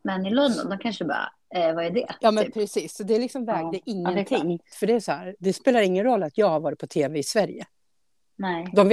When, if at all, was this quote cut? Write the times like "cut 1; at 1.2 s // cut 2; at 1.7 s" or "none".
cut 1; at 4.7 s